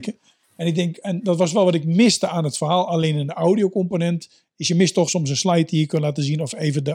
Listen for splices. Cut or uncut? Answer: cut